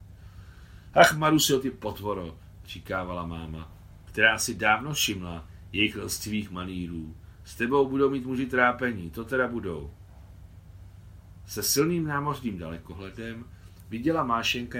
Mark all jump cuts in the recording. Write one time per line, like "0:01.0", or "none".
none